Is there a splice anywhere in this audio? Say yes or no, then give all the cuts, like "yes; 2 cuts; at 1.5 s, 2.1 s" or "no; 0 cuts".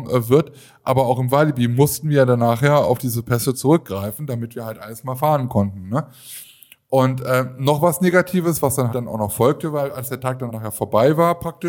yes; 2 cuts; at 8.9 s, 10.5 s